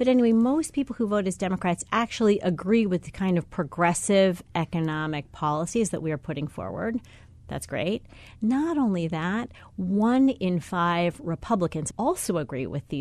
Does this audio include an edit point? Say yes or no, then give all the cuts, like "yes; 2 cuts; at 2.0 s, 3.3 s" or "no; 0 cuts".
yes; 1 cut; at 11.9 s